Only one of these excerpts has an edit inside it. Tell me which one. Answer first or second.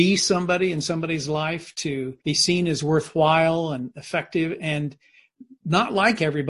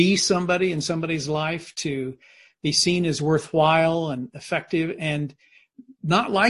first